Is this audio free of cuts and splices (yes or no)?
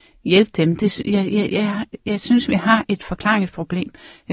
yes